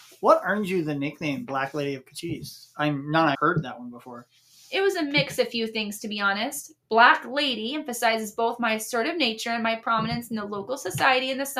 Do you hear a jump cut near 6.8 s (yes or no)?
no